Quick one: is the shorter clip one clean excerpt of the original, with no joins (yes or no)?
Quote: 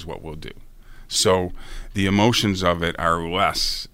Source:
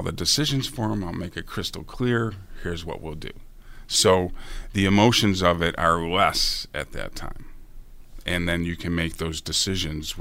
yes